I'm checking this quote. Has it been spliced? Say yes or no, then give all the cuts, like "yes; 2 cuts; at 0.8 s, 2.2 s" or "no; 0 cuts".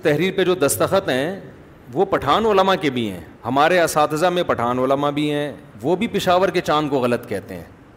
yes; 2 cuts; at 3.3 s, 5.7 s